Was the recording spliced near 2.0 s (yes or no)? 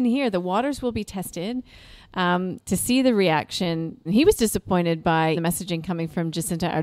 no